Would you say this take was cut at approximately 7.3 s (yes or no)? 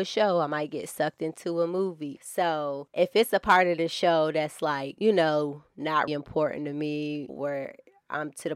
yes